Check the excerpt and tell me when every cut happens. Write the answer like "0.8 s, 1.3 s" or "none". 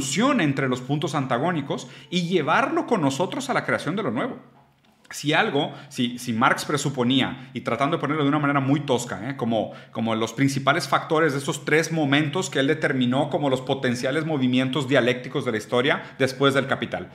none